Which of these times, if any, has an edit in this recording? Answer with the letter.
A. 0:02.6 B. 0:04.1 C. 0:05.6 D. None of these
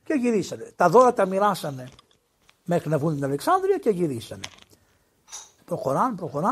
C